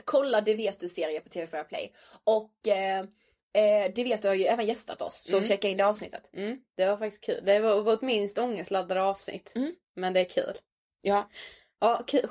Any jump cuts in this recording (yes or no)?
no